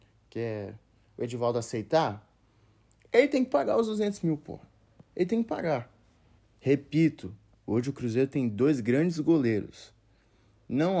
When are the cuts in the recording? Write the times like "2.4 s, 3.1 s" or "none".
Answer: 6.4 s